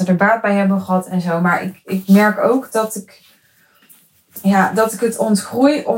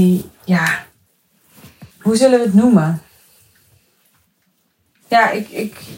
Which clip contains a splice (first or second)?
second